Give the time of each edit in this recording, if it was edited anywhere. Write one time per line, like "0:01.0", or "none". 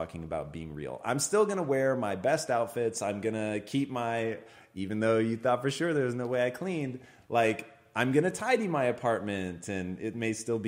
none

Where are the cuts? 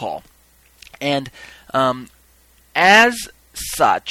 none

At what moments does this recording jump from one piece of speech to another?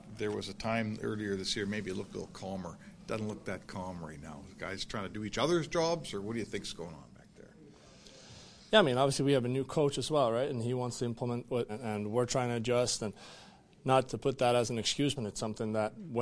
0:11.7
0:14.1
0:15.2

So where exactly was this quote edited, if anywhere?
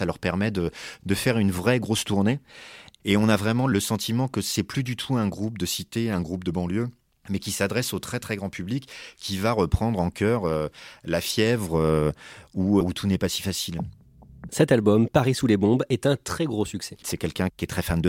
0:12.8
0:14.5
0:17.0

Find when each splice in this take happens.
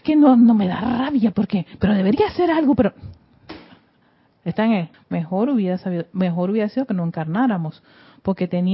0:01.3
0:04.9

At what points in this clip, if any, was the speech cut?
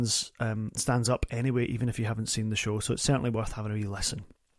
none

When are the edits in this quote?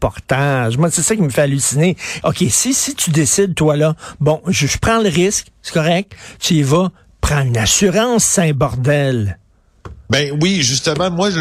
0:02.2

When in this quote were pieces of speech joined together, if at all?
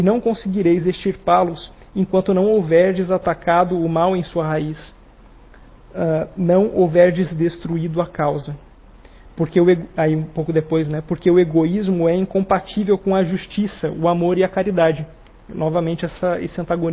none

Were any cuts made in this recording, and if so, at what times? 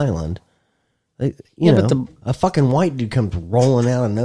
none

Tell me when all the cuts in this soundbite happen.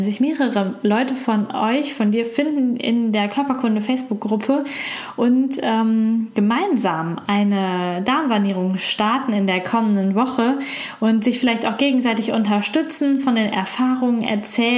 none

